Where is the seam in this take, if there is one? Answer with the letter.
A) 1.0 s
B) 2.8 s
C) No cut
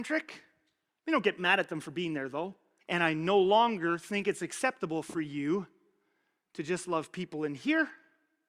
B